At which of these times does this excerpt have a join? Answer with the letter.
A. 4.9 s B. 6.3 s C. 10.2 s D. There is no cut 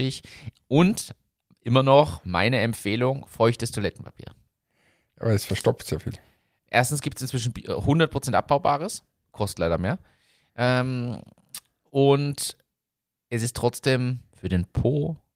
D